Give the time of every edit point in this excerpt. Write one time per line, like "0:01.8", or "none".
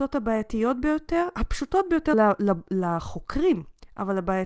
0:02.1

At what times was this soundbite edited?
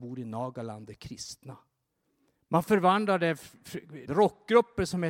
0:04.1

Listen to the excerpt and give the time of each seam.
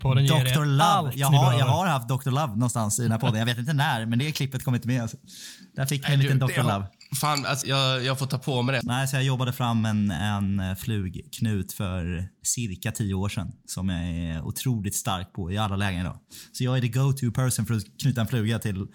0:07.6
0:08.8

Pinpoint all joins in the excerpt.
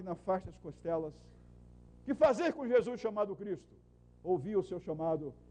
0:01.9

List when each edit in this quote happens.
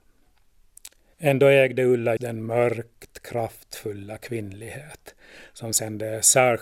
0:01.1
0:02.2

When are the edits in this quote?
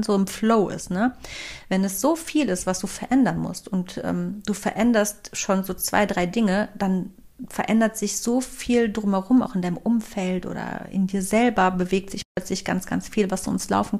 none

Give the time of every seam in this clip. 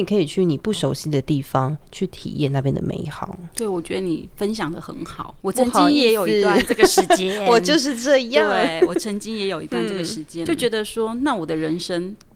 0:05.4
0:10.5

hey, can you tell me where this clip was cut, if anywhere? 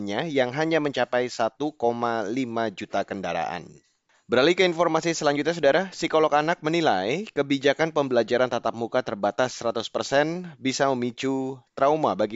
none

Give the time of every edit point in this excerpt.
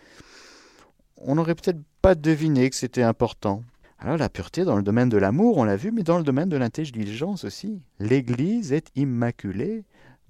0:03.8
0:07.9

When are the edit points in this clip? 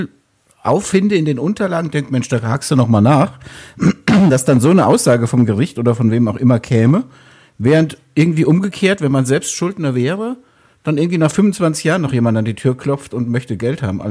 none

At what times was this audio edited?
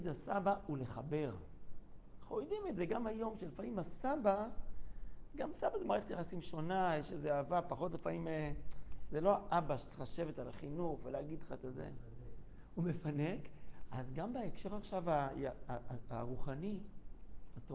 none

